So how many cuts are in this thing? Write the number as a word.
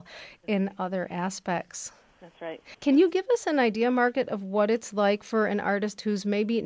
one